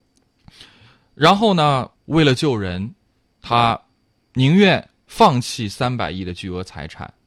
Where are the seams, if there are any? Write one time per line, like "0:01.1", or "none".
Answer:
0:01.9